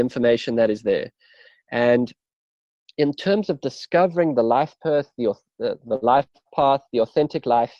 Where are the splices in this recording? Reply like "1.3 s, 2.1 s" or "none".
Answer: none